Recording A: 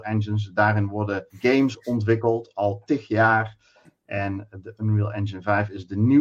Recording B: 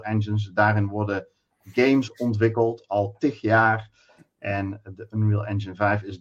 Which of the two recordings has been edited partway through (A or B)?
A